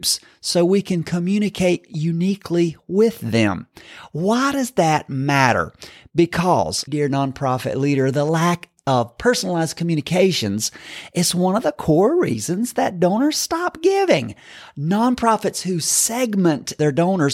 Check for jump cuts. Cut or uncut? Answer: cut